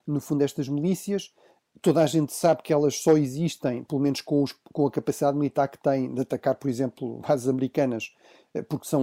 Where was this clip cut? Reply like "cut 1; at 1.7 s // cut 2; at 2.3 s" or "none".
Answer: none